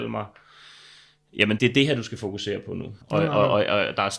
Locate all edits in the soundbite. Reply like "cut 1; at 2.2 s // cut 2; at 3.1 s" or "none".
cut 1; at 1.6 s // cut 2; at 3.0 s